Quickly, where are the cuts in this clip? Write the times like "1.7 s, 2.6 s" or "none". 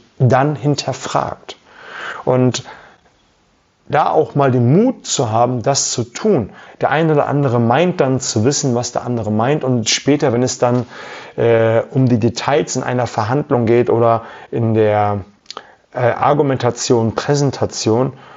none

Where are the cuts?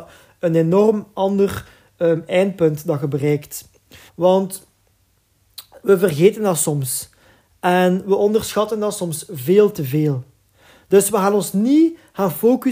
4.1 s

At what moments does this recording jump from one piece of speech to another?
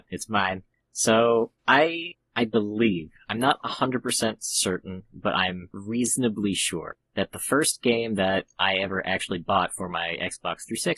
1.6 s

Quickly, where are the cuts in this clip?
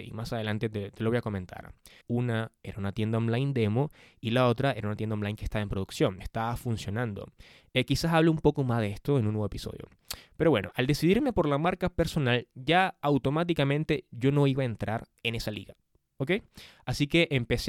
2.0 s, 7.6 s

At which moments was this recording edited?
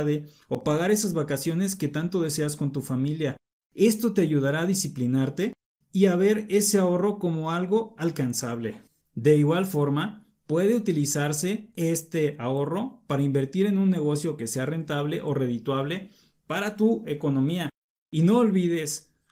none

